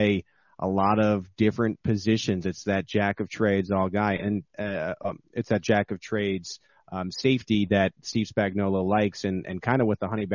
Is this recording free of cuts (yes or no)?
yes